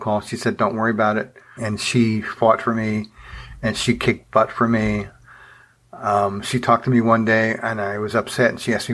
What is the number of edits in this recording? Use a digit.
1